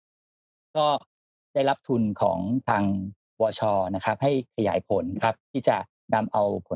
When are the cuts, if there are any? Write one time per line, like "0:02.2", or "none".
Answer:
0:05.4